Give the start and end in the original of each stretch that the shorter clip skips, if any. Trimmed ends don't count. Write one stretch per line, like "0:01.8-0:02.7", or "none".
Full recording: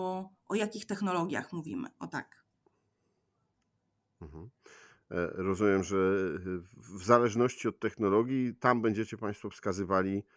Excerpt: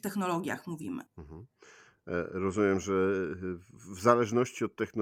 0:01.9-0:04.1